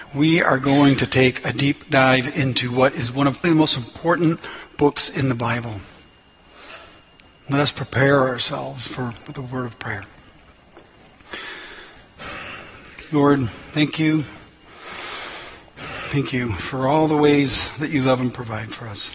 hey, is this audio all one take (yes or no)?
no